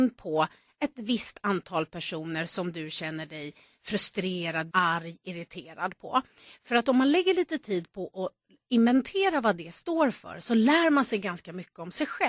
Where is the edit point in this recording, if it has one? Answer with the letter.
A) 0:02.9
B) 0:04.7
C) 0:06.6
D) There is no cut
B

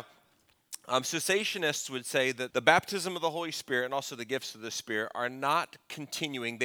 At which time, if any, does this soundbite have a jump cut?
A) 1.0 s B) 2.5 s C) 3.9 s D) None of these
B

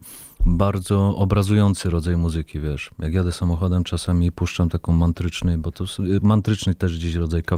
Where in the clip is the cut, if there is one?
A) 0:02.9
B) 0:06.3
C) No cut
C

